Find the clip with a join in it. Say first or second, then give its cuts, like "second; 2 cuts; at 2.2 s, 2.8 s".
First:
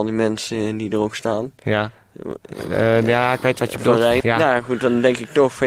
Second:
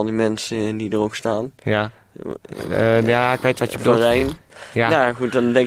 first; 1 cut; at 4.2 s